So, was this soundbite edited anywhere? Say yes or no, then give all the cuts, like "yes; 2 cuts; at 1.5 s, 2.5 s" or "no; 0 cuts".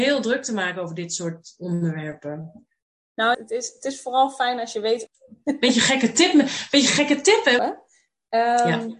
yes; 3 cuts; at 3.3 s, 5.1 s, 7.6 s